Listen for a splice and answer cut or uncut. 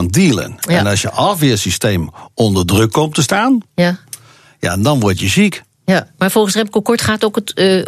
uncut